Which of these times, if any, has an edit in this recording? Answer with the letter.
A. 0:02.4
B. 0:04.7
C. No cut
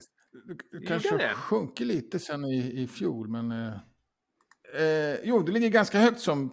C